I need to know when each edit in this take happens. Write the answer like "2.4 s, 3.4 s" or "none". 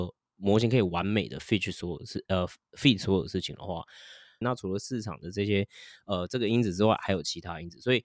4.4 s